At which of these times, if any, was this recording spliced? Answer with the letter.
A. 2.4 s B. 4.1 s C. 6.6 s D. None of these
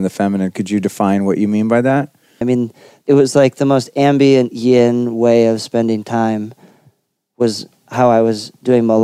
A